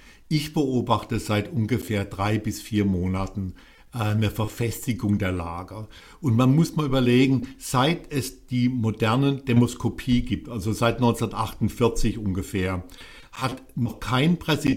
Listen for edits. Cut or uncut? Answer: uncut